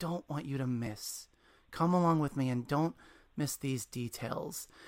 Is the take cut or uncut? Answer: uncut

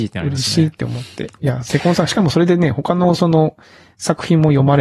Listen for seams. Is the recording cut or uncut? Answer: uncut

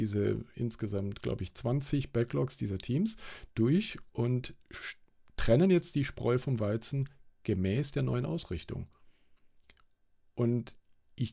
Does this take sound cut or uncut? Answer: uncut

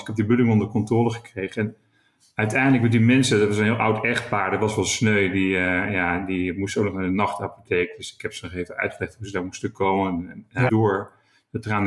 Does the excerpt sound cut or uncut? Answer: cut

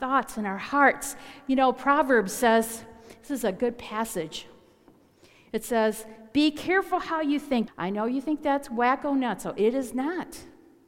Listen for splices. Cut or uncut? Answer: cut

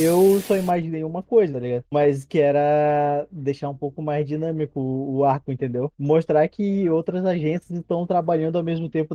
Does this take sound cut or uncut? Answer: cut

